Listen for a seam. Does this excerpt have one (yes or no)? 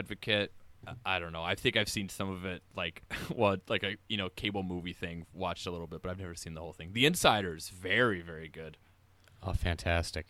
no